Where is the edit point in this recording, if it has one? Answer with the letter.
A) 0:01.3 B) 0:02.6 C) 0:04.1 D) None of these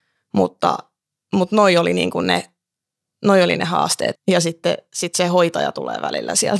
C